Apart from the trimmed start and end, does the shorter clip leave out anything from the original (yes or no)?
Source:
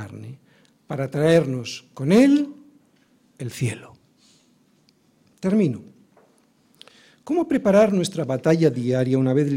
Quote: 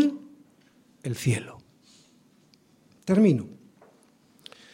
no